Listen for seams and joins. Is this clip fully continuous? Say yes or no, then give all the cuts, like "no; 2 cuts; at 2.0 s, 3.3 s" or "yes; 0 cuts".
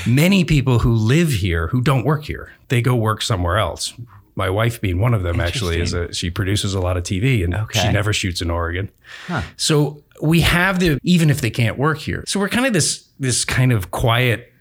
no; 2 cuts; at 11.0 s, 12.2 s